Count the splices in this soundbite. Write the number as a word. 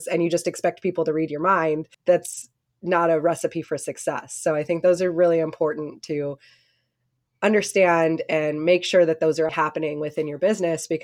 two